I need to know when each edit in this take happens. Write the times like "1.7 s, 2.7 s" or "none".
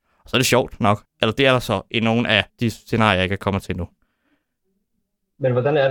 1.0 s, 2.5 s